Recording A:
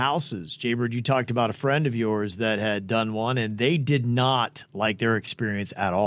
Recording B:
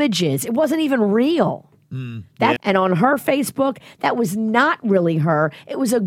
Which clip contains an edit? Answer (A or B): B